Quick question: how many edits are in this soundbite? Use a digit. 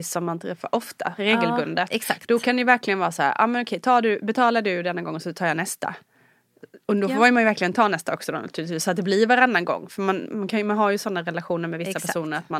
0